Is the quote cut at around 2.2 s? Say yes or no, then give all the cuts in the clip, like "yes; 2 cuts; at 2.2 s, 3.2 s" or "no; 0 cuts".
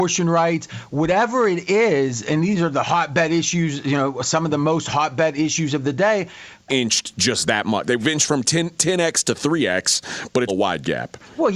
no; 2 cuts; at 6.7 s, 10.5 s